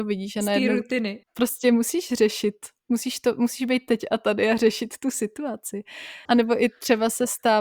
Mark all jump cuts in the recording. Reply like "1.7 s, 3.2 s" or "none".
1.2 s, 6.3 s